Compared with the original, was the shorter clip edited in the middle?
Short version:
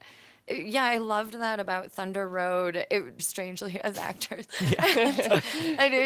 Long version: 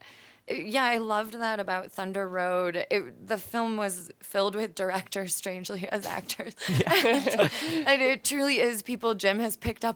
yes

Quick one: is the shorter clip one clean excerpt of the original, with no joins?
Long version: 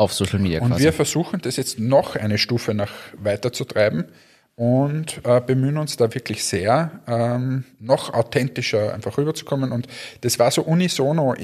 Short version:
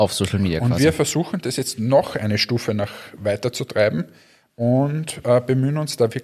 yes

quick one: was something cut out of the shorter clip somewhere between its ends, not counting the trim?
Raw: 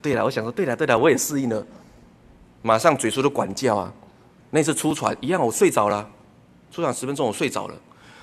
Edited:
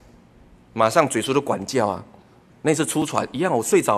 no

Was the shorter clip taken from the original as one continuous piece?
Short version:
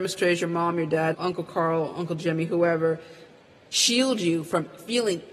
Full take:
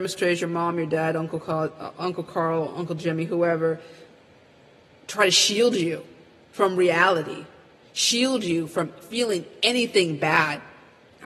no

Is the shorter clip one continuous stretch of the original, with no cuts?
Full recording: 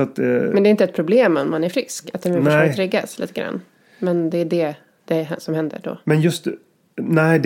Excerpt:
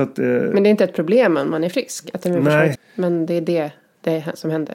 no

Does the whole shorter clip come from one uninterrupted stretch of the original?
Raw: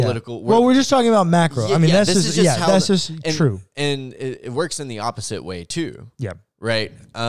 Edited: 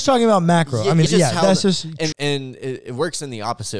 no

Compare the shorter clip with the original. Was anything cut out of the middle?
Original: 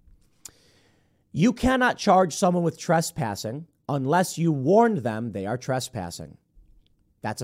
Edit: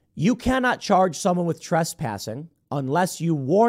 no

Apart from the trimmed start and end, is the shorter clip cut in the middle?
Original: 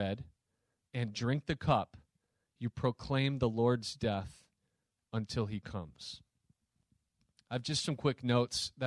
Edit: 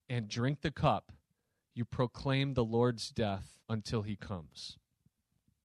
yes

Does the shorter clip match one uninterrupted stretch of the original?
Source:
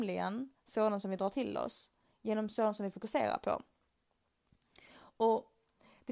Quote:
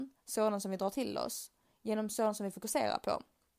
yes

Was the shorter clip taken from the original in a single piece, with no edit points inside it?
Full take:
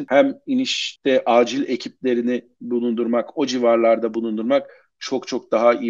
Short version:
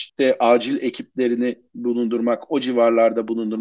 yes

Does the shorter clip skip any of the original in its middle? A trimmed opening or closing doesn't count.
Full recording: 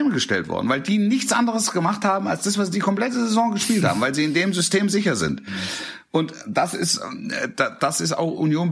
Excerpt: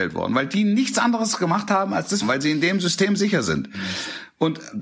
yes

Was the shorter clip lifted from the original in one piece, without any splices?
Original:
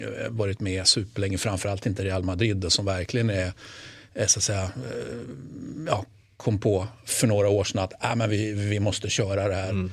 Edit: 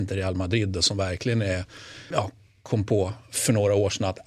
no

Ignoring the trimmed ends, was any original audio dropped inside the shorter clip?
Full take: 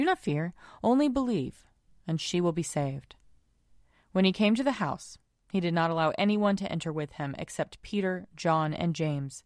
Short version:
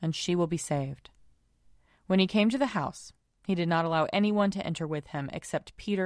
no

